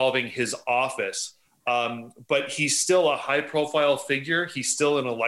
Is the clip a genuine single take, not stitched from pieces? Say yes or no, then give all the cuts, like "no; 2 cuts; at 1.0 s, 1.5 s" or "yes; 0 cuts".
yes; 0 cuts